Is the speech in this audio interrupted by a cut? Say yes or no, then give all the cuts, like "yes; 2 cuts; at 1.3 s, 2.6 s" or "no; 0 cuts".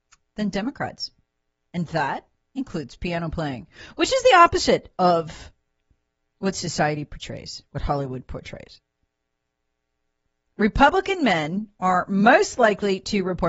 no; 0 cuts